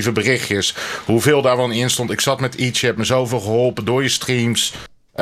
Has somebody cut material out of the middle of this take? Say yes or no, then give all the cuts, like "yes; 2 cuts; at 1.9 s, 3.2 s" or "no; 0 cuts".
no; 0 cuts